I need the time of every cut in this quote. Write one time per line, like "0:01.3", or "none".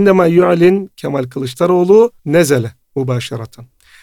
0:02.2